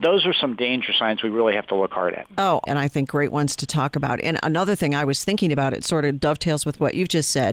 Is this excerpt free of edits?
no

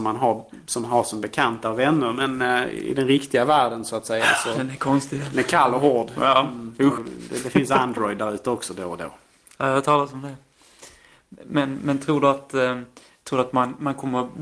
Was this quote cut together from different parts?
yes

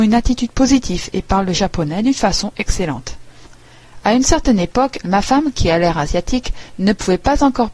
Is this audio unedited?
no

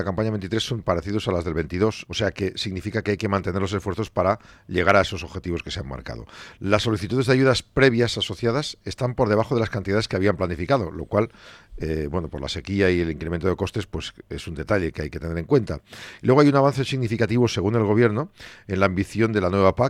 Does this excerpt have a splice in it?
yes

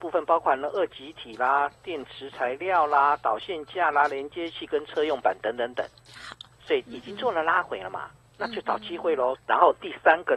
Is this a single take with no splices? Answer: no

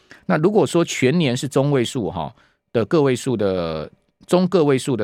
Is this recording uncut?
yes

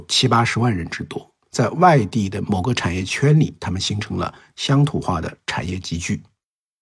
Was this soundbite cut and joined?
no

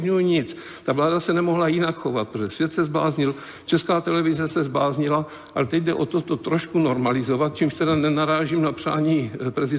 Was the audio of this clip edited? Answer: no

